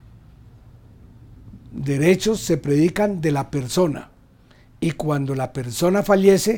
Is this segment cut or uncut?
uncut